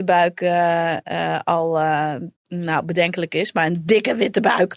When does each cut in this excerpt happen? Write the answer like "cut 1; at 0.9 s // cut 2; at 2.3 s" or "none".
cut 1; at 2.4 s